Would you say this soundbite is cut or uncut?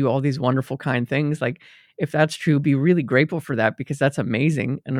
uncut